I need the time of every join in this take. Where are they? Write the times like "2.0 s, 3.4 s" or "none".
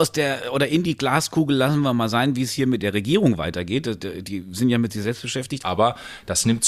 5.6 s